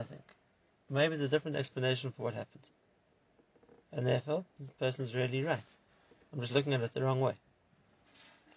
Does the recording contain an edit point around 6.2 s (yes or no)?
no